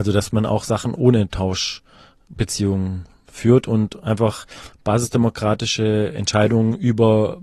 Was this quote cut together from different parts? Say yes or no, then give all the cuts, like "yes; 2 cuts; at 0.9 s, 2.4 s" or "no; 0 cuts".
no; 0 cuts